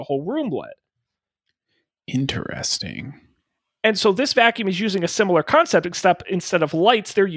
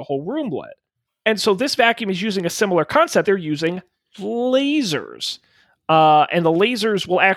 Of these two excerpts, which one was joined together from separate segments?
second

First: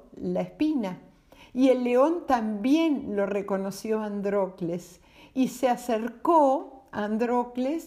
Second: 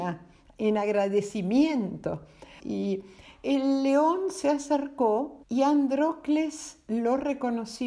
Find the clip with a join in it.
second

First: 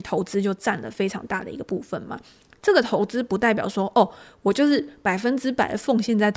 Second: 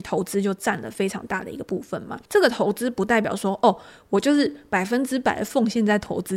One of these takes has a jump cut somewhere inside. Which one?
second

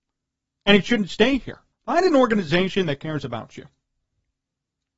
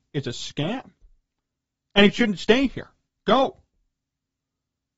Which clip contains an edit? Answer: first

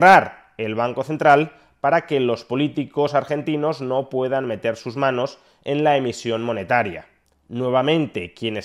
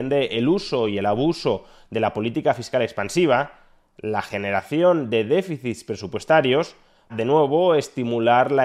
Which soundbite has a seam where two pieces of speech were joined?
second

